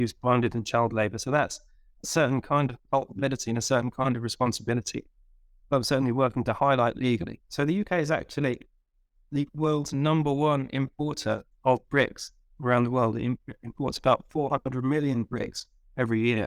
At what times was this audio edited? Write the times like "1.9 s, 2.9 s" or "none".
7.4 s